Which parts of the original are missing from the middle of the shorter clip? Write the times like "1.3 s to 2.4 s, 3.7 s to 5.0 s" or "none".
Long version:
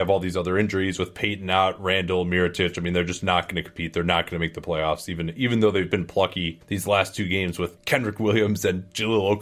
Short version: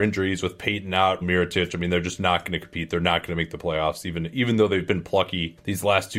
1.8 s to 2.2 s